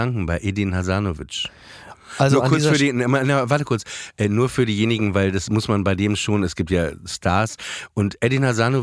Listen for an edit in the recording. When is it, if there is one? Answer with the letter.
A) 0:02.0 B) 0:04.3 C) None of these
C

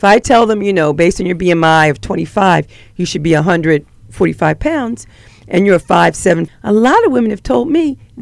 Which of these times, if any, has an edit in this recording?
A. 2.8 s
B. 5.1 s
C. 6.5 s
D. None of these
C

